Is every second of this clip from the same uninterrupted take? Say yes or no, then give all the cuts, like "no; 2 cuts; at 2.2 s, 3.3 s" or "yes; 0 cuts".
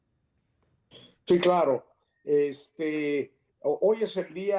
yes; 0 cuts